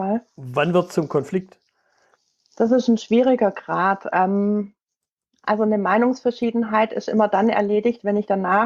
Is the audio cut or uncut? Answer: uncut